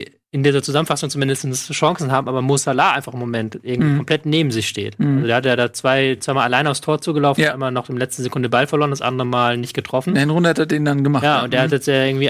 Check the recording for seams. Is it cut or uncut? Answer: uncut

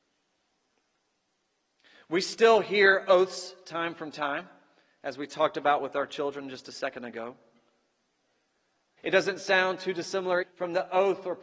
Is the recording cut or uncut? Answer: cut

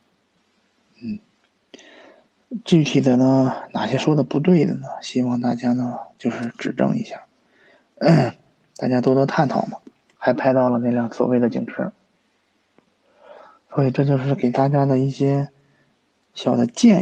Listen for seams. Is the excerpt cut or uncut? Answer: cut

